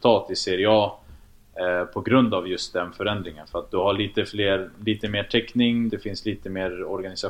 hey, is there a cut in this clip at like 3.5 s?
no; 1 cut; at 5.9 s

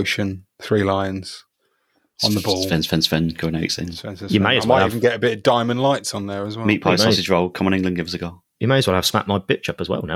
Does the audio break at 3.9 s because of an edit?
no; 0 cuts

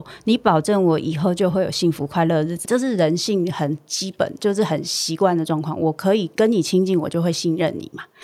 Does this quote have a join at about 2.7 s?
yes; 1 cut; at 2.7 s

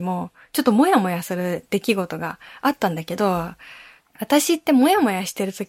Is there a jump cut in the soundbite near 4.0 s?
yes; 1 cut; at 4.0 s

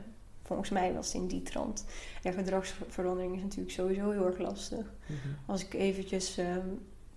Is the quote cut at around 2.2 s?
yes; 1 cut; at 2.2 s

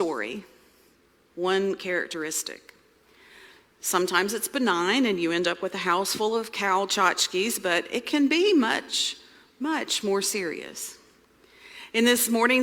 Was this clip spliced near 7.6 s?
no; 0 cuts

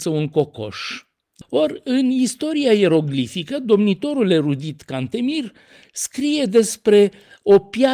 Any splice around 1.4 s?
yes; 1 cut; at 1.4 s

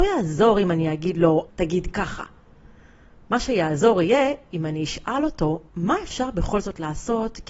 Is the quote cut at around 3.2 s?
no; 2 cuts; at 1.5 s, 5.7 s

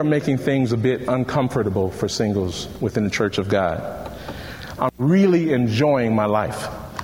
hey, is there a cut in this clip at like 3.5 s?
no; 1 cut; at 4.8 s

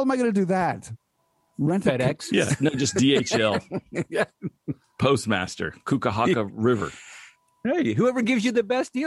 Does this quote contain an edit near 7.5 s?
no; 1 cut; at 2.3 s

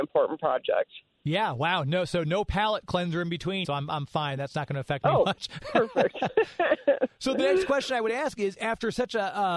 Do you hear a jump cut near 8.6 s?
no; 1 cut; at 3.6 s

